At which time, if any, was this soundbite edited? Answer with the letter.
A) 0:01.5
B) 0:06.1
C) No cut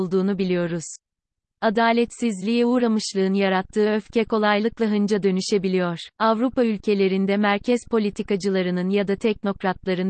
B